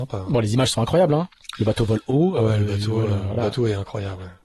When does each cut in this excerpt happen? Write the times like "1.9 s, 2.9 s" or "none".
none